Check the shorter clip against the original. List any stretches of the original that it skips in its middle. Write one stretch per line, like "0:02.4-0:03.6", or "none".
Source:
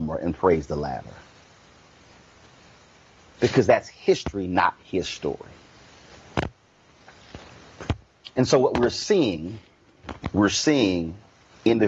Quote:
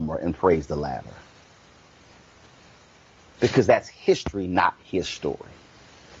none